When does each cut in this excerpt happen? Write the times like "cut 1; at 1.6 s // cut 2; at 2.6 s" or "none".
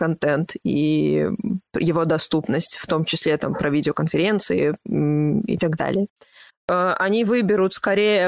cut 1; at 6.5 s